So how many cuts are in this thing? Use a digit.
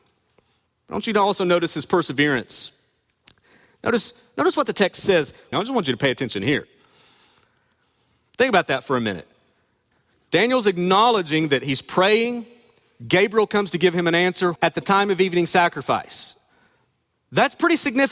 2